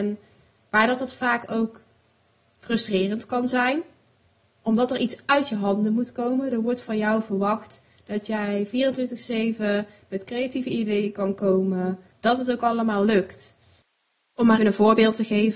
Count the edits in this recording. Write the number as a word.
one